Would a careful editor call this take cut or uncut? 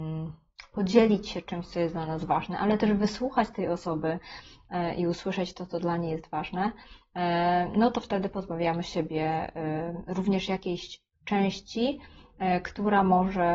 uncut